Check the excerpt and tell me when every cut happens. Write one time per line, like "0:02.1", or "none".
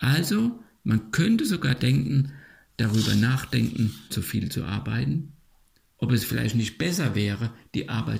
0:04.1